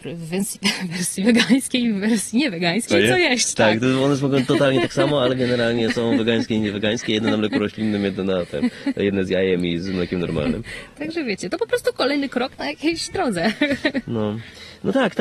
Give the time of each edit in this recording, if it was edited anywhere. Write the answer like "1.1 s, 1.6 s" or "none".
2.9 s